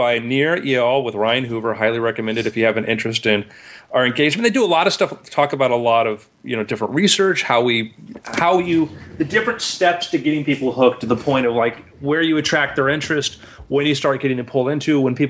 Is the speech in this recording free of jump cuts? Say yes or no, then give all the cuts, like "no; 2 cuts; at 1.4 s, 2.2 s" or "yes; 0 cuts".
yes; 0 cuts